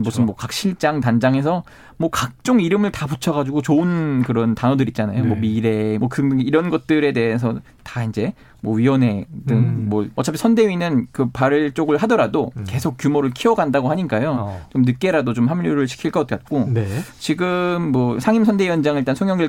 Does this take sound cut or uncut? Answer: cut